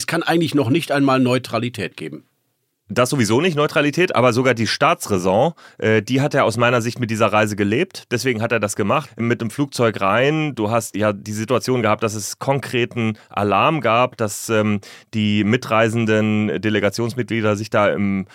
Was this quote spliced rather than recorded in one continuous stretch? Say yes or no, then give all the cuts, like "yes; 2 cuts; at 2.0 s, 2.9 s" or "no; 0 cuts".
yes; 2 cuts; at 9.1 s, 10.9 s